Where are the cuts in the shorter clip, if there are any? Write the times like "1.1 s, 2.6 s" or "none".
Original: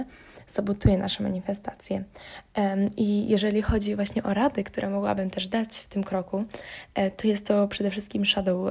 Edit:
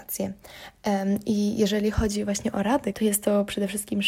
2.9 s